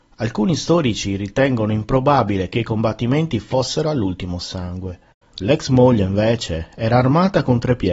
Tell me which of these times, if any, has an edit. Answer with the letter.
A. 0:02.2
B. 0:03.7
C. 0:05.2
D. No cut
C